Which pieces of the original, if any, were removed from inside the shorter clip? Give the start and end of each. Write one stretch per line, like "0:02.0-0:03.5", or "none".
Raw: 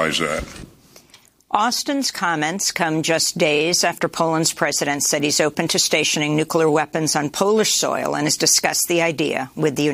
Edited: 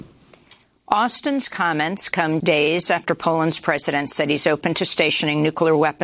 0:03.0-0:03.3